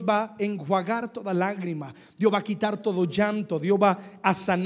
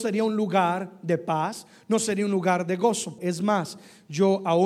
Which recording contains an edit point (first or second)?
second